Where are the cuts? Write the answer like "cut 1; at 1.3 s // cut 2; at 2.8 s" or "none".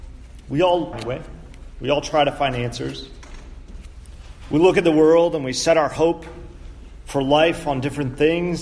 cut 1; at 0.9 s